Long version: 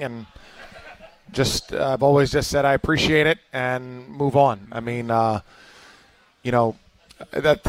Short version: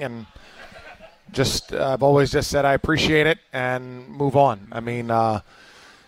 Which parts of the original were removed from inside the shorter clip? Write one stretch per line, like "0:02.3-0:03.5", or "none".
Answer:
none

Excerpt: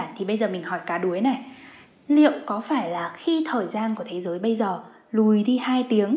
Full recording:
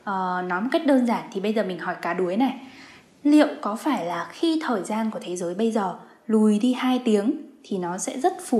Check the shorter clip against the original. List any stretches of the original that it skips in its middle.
none

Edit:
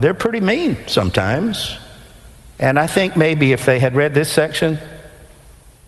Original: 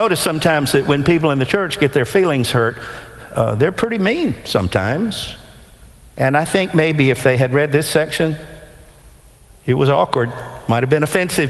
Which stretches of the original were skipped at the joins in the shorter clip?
none

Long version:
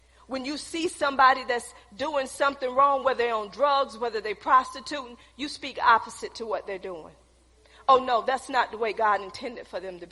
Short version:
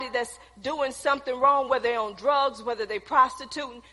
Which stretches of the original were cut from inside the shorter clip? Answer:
none

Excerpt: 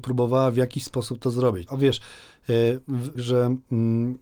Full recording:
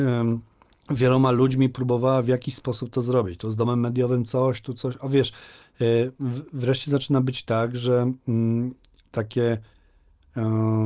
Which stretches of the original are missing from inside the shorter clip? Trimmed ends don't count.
0:03.4-0:05.0
0:06.5-0:07.7

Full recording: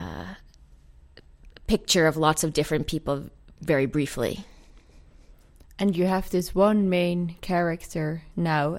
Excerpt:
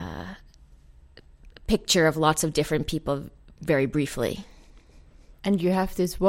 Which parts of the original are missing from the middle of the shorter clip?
0:05.4-0:05.7

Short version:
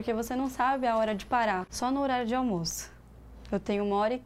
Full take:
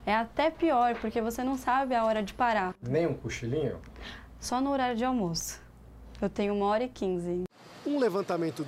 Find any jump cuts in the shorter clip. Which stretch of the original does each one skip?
0:02.8-0:04.4

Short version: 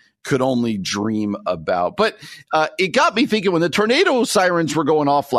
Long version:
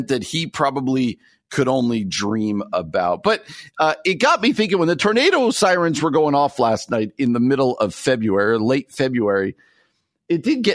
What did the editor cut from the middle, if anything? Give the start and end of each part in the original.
none

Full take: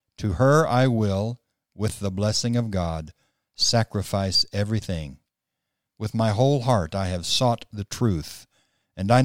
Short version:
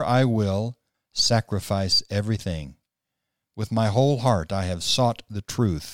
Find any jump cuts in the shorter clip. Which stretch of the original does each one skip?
0:01.6-0:03.4

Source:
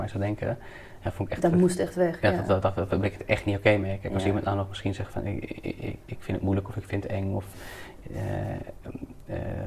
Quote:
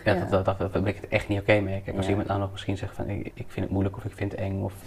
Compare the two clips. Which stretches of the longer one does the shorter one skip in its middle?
0:05.5-0:06.0

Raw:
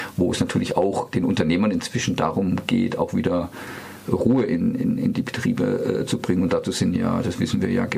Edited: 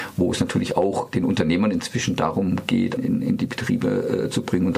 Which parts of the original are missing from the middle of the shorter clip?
0:03.0-0:04.7

